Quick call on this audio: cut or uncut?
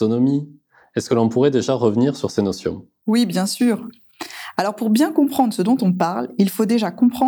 uncut